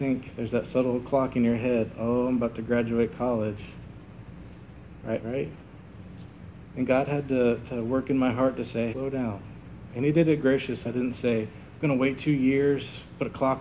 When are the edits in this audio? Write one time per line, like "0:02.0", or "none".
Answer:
0:05.2
0:08.9
0:10.8